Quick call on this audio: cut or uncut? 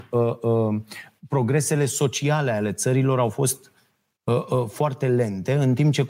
uncut